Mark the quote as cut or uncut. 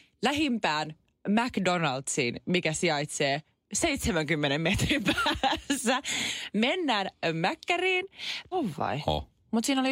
cut